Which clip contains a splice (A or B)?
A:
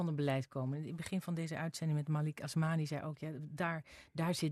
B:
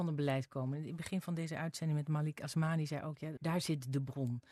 B